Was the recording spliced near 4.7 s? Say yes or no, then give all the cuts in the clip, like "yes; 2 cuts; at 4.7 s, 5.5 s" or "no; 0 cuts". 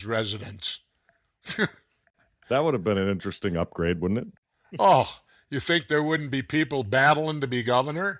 no; 0 cuts